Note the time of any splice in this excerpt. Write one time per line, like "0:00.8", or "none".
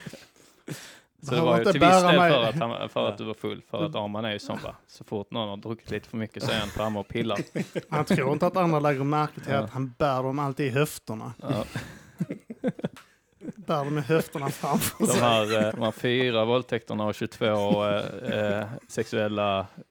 0:15.7
0:18.9